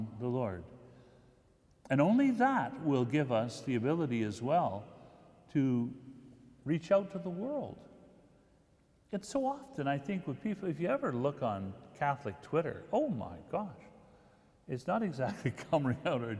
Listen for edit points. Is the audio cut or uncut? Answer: uncut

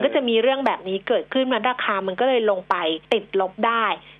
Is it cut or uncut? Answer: cut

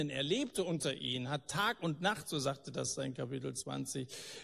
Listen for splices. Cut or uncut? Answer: uncut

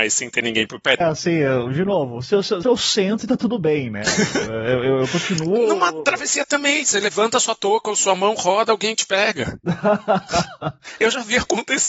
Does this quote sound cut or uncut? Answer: cut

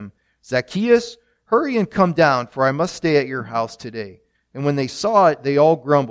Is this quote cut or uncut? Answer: cut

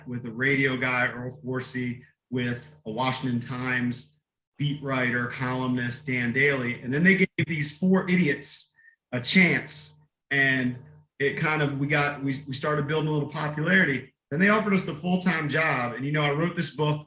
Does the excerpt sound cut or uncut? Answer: uncut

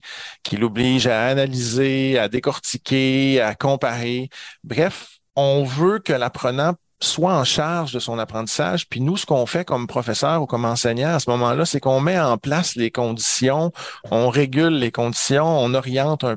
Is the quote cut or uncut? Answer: uncut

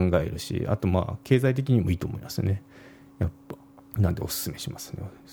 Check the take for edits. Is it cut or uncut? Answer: cut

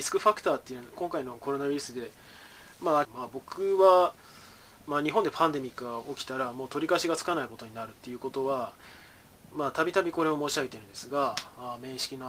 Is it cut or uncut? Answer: cut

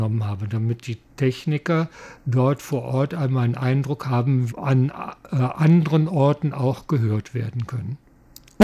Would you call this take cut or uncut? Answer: cut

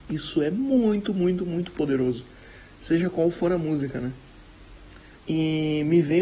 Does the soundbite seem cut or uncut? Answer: cut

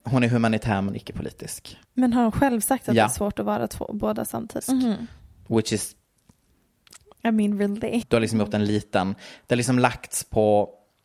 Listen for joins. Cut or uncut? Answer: cut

